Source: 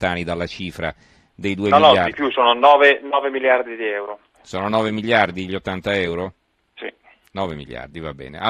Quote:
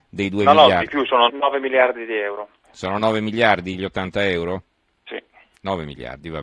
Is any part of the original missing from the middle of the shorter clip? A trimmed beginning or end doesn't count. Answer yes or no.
yes